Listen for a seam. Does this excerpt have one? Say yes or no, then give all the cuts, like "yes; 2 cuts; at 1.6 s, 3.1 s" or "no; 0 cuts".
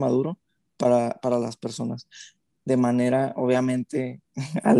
yes; 1 cut; at 2.5 s